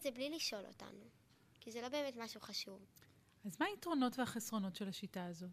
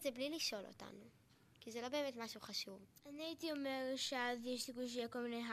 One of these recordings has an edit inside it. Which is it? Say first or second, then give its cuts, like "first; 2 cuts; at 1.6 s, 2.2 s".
second; 1 cut; at 3.0 s